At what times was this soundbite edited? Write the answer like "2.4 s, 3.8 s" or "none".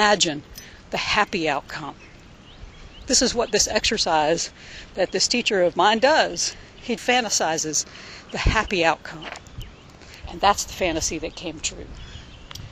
7.0 s, 10.2 s